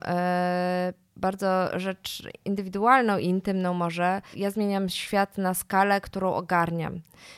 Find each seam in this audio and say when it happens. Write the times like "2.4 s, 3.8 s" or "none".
4.3 s

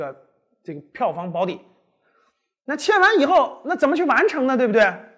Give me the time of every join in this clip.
none

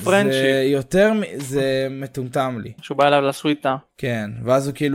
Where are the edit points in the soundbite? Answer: 2.8 s

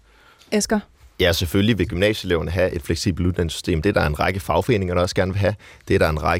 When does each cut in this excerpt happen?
none

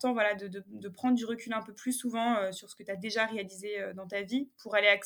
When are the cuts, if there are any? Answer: none

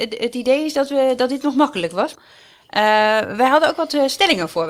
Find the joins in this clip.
2.1 s

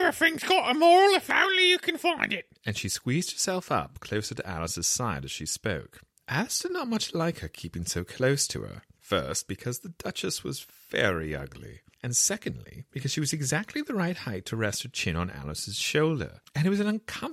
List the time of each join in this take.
none

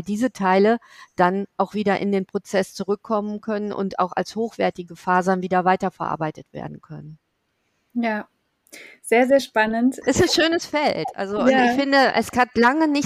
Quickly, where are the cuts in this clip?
10.0 s

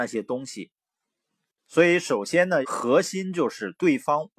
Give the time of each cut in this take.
2.6 s

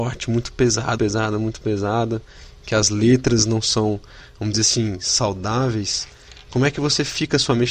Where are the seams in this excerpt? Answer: 1.0 s

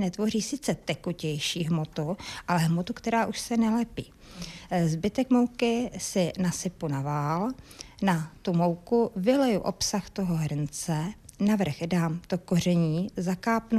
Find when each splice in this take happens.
none

